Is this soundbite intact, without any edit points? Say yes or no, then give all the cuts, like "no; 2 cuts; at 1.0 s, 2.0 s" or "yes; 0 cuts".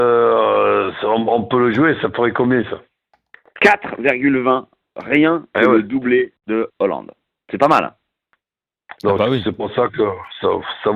yes; 0 cuts